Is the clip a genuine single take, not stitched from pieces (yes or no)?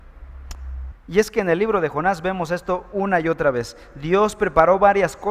no